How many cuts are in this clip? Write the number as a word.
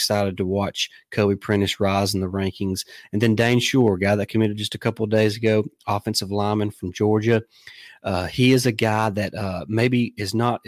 zero